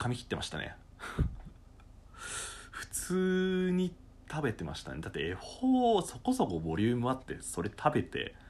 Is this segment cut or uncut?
uncut